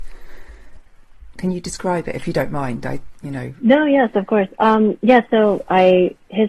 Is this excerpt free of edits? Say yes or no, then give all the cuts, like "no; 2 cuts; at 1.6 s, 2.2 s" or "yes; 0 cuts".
no; 1 cut; at 1.3 s